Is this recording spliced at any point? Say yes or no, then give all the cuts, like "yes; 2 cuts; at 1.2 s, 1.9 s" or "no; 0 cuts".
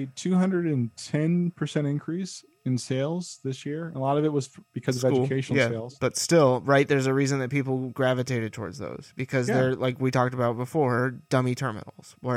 no; 0 cuts